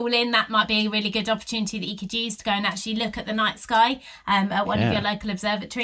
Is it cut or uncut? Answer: uncut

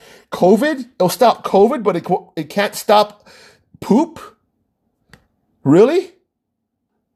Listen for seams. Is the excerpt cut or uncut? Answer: uncut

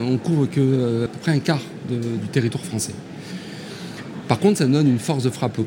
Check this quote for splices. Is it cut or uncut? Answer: uncut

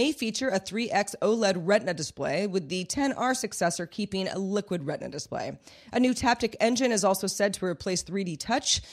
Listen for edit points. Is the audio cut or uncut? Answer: uncut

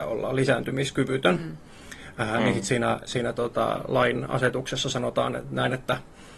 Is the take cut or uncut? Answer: uncut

